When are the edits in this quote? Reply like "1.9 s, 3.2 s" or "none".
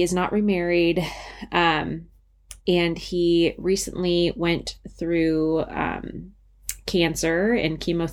2.6 s